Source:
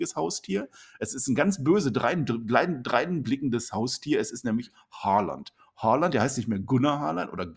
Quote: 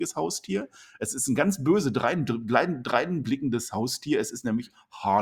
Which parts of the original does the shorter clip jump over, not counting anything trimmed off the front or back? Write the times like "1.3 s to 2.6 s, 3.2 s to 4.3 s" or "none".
none